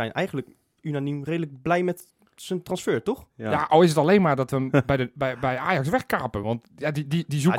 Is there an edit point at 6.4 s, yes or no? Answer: no